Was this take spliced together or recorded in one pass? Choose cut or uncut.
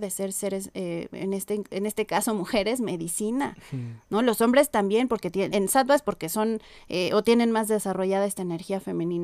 cut